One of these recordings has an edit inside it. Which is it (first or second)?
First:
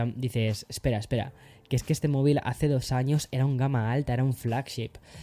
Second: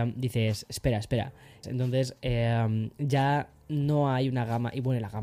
second